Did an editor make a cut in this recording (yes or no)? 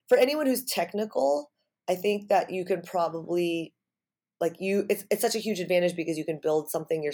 no